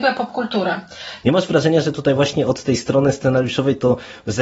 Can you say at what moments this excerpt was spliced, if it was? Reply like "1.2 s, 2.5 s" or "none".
1.2 s